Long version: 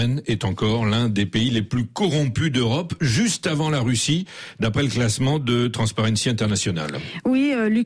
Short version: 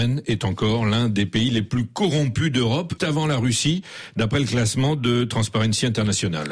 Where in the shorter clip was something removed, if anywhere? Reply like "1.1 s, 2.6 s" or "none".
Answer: 3.0 s